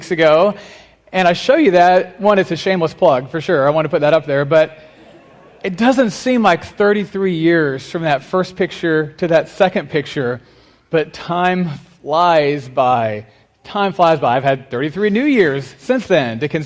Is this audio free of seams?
yes; 0 cuts

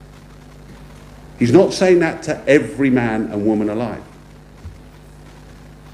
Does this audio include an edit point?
no; 0 cuts

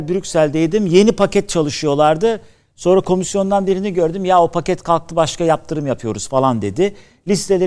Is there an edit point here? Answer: no; 0 cuts

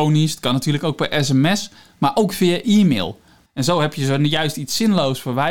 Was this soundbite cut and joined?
yes; 1 cut; at 3.4 s

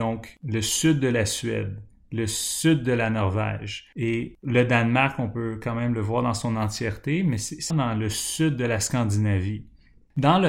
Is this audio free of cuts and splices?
no; 1 cut; at 7.7 s

